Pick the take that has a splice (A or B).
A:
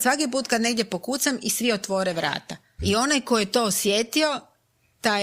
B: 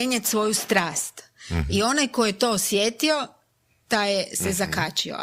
A